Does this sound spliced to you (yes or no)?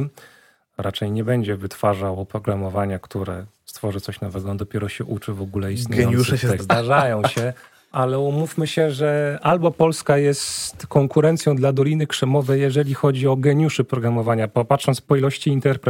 yes